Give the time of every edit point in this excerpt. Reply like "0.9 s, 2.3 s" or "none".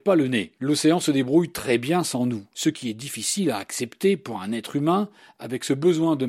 none

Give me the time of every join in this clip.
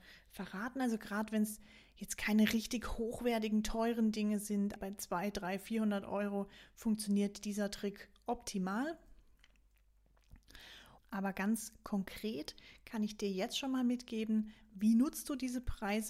4.8 s, 11.0 s

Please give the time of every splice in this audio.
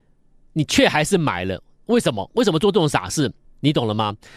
3.4 s

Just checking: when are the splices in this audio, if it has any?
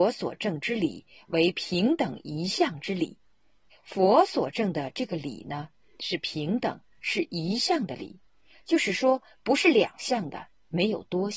3.7 s

